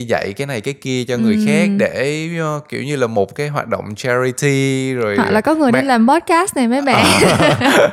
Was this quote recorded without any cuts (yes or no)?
yes